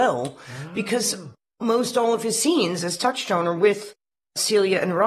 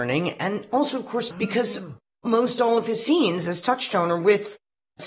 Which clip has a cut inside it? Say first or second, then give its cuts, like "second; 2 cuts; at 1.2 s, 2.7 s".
second; 1 cut; at 1.3 s